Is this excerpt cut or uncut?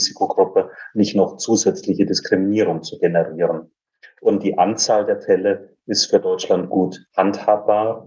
uncut